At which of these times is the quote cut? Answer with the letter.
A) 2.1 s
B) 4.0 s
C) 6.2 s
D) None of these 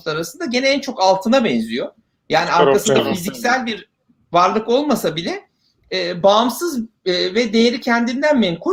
D